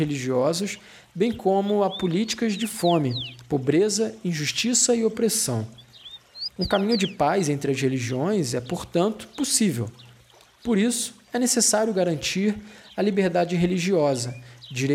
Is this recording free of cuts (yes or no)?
yes